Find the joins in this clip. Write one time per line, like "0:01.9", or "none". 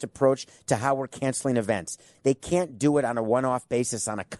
0:02.1